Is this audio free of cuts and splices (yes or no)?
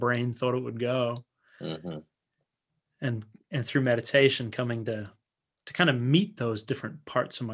yes